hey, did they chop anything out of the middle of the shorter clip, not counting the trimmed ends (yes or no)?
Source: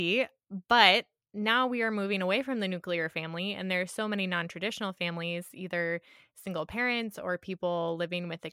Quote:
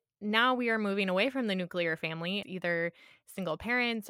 yes